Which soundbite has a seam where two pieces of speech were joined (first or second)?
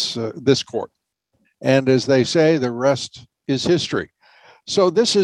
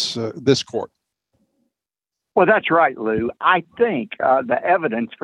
first